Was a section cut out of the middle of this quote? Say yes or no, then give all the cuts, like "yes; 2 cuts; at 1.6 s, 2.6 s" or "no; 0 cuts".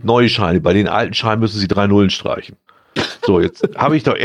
yes; 1 cut; at 2.7 s